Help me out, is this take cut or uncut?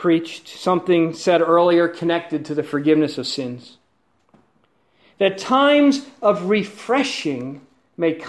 uncut